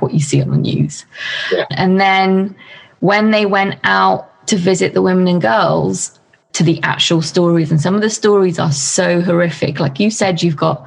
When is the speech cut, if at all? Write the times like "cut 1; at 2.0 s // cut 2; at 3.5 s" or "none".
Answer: cut 1; at 1.7 s // cut 2; at 6.5 s